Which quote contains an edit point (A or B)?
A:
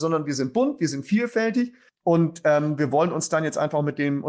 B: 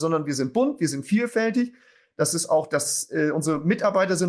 A